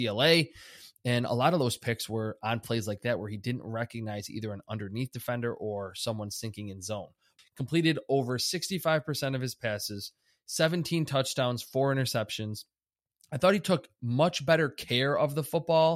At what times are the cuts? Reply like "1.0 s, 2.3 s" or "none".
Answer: 7.4 s